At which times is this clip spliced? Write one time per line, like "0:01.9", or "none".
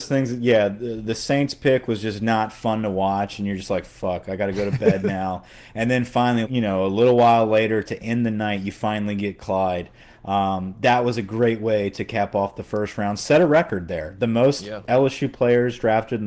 0:06.4